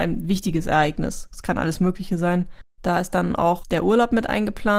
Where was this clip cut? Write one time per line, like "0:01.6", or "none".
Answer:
0:02.8